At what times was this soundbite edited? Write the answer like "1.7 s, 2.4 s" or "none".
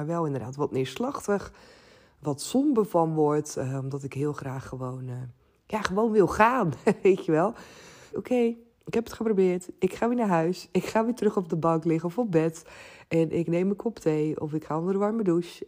8.1 s